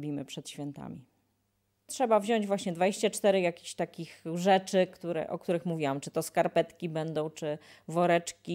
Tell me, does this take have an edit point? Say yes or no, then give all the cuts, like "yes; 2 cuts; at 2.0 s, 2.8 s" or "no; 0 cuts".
no; 0 cuts